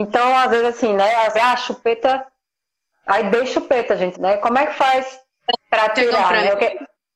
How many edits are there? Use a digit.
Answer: 2